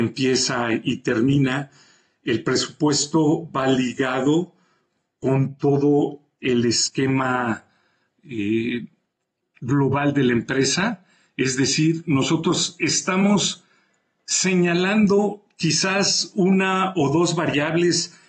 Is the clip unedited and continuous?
yes; 0 cuts

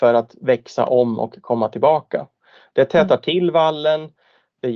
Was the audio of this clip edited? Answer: no; 0 cuts

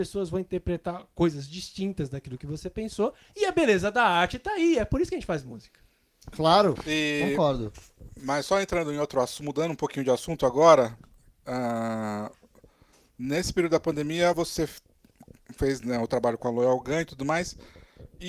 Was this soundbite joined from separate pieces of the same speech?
no; 0 cuts

